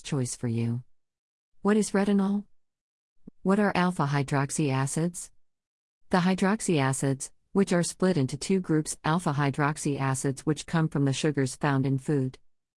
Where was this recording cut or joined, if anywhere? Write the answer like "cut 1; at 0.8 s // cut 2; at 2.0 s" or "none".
cut 1; at 3.2 s